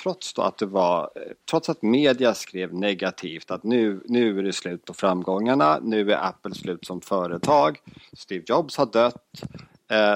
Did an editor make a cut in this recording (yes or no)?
no